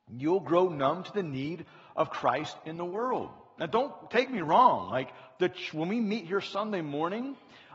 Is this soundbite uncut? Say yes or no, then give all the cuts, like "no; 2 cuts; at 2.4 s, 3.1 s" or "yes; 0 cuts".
yes; 0 cuts